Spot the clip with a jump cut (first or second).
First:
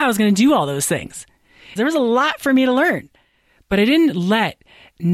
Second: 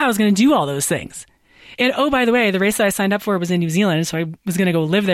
first